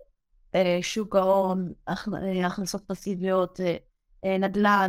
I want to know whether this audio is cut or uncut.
uncut